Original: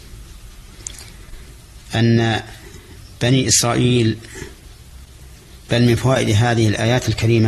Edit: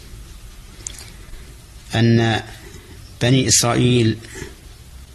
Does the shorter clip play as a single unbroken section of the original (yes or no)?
yes